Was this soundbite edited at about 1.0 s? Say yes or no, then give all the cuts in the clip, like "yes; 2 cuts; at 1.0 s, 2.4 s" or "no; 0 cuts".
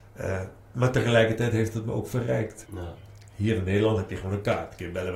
no; 1 cut; at 2.7 s